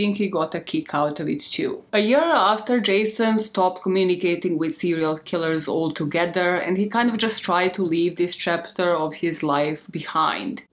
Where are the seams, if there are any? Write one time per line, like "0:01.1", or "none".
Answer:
0:01.9